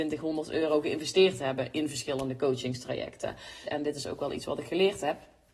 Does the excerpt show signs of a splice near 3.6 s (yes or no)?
yes